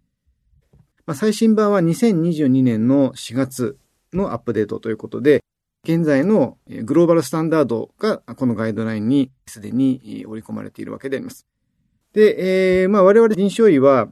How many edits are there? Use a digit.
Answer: 2